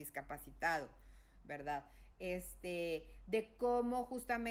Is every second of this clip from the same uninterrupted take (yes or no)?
no